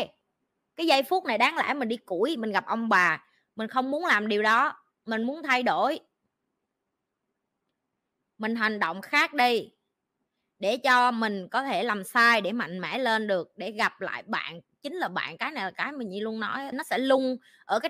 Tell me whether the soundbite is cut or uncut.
cut